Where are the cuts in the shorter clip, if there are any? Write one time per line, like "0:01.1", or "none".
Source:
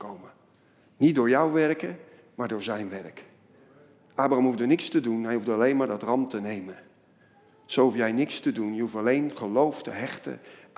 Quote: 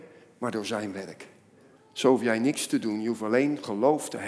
0:01.8